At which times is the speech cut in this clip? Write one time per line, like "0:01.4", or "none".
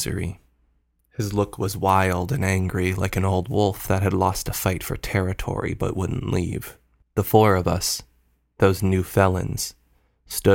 0:01.0
0:07.0